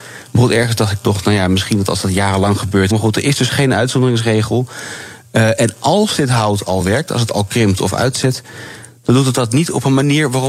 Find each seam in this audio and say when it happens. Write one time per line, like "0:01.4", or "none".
0:02.9